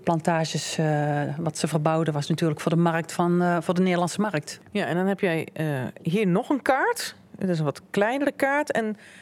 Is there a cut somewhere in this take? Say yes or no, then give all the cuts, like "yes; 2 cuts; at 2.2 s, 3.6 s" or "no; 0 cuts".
no; 0 cuts